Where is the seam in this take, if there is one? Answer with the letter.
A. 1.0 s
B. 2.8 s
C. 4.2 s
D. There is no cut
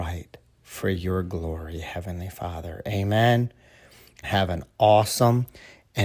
C